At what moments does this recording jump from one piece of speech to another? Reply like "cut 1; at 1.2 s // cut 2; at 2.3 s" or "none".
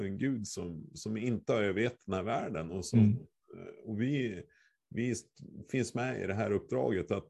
none